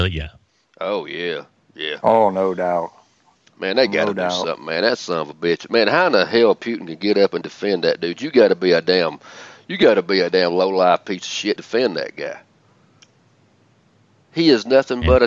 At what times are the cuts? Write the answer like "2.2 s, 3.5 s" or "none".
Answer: 7.4 s, 11.6 s